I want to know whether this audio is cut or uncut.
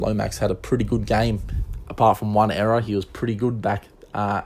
uncut